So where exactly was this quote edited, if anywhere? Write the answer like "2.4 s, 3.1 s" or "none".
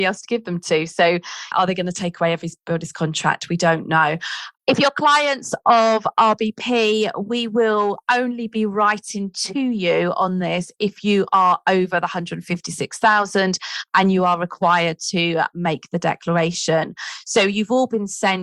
1.5 s